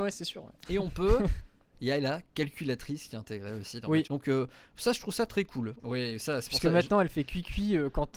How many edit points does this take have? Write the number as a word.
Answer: two